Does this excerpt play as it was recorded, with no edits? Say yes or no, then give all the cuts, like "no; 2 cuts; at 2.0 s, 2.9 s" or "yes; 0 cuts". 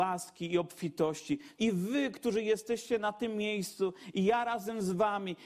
no; 1 cut; at 1.6 s